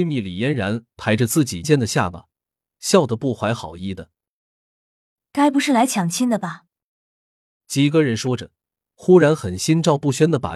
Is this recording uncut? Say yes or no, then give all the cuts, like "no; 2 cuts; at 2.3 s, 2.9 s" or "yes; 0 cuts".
no; 2 cuts; at 1.6 s, 7.6 s